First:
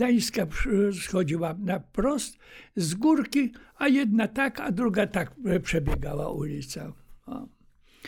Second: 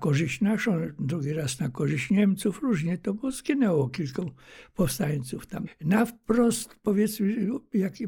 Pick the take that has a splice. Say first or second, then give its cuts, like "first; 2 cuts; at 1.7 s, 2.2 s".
second; 1 cut; at 5.7 s